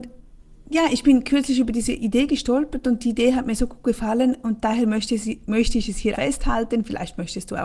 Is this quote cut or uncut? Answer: cut